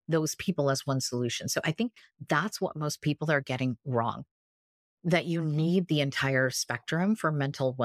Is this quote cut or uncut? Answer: uncut